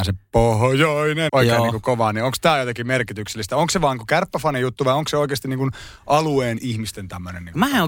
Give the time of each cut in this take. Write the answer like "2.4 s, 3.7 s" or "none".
1.3 s